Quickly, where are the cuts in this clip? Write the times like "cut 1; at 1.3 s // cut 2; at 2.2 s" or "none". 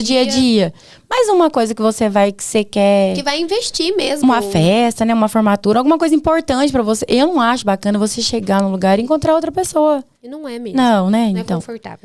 none